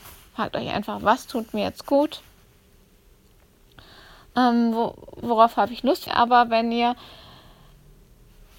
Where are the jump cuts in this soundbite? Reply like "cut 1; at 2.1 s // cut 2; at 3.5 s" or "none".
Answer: cut 1; at 6.1 s